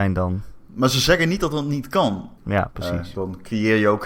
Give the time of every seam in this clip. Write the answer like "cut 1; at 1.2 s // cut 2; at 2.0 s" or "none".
cut 1; at 2.4 s